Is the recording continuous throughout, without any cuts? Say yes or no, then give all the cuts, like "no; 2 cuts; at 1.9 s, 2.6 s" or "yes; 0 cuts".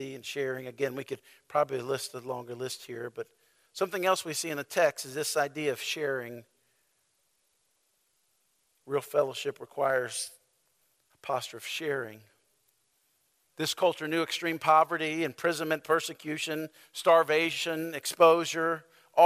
yes; 0 cuts